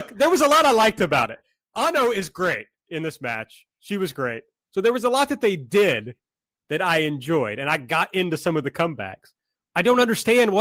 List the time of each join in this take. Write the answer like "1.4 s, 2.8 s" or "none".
4.6 s, 9.6 s